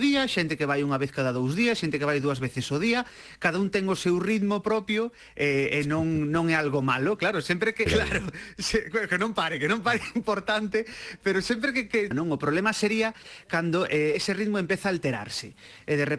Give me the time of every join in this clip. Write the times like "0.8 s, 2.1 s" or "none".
7.9 s, 12.1 s